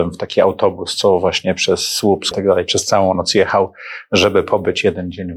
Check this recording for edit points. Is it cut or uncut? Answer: cut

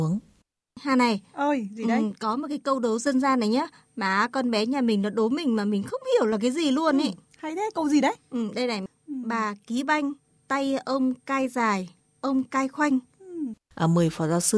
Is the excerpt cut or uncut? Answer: cut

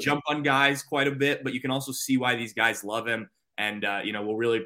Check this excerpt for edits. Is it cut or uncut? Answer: uncut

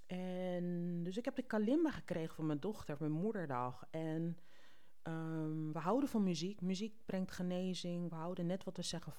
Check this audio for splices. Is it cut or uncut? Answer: uncut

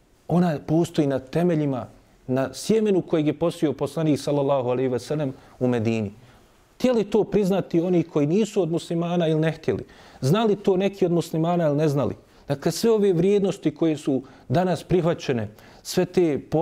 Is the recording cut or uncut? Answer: uncut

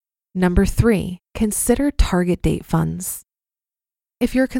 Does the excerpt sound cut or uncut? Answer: uncut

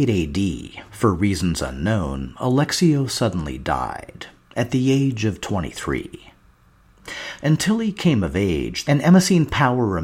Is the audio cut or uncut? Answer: cut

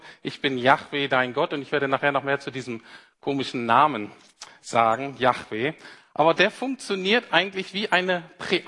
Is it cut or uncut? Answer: uncut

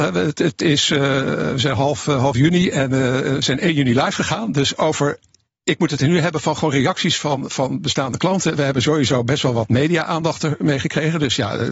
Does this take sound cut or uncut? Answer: uncut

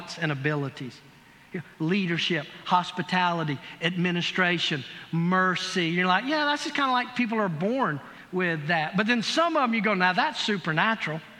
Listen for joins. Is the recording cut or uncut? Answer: uncut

